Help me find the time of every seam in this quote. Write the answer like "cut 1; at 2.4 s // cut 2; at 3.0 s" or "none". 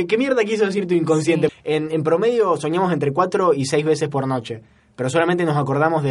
cut 1; at 1.5 s

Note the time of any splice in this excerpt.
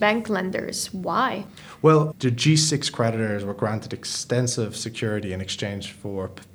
cut 1; at 2.1 s

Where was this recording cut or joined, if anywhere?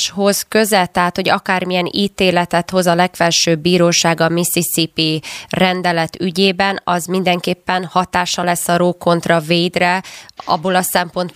none

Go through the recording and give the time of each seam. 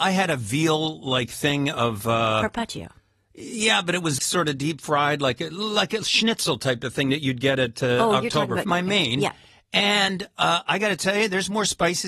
cut 1; at 4.2 s // cut 2; at 8.6 s

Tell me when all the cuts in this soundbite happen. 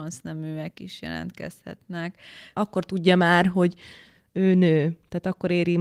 cut 1; at 2.5 s

